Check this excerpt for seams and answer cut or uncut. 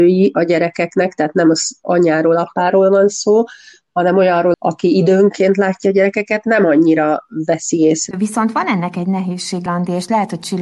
cut